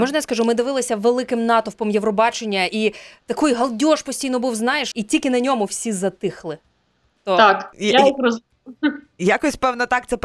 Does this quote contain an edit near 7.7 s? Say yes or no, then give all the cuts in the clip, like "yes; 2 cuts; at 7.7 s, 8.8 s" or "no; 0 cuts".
yes; 2 cuts; at 4.9 s, 7.7 s